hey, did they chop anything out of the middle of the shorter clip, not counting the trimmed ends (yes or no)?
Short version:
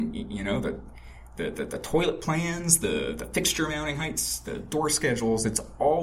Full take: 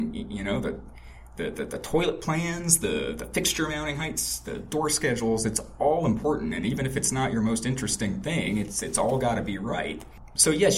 no